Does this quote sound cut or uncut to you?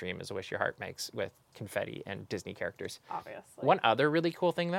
cut